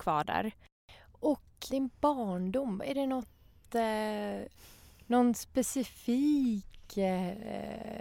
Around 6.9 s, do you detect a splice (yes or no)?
no